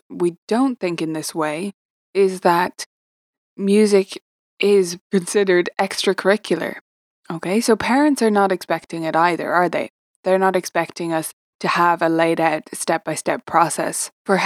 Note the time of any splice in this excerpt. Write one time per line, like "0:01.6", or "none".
none